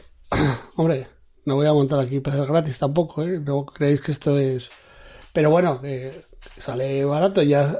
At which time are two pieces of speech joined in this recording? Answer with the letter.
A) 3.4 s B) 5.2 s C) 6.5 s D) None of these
D